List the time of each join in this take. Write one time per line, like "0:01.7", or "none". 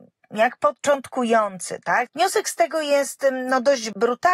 0:02.1